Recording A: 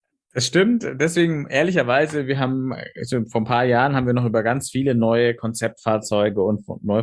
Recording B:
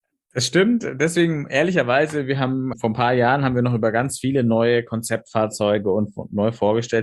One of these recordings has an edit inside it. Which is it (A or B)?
B